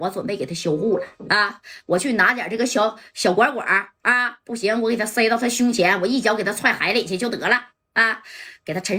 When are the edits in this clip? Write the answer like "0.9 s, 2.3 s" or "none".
none